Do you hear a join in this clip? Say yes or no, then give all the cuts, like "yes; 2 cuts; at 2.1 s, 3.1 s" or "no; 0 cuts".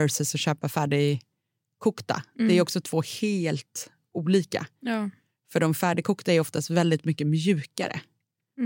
no; 0 cuts